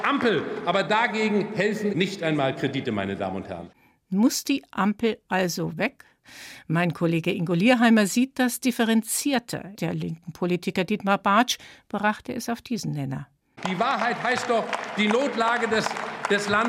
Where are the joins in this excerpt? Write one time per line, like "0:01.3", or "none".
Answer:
0:01.9
0:09.8